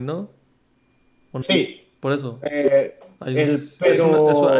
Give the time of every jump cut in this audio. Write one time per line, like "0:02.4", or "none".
0:01.4

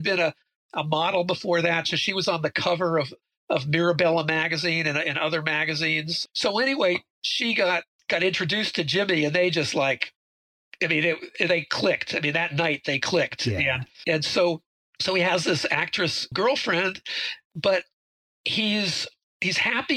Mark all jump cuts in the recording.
none

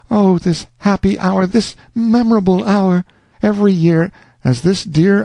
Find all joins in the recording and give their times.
0:01.5
0:03.3

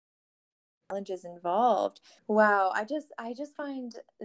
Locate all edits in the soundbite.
0:02.2

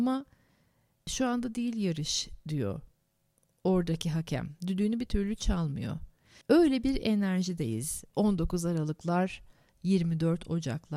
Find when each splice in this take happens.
0:06.4

